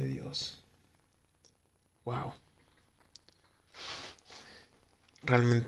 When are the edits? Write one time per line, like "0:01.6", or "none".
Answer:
none